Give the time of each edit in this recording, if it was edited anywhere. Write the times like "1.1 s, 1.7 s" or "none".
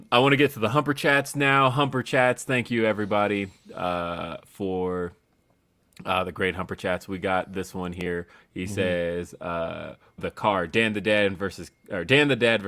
8.4 s, 10.2 s